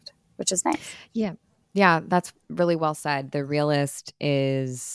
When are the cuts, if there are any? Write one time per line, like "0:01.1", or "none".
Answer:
none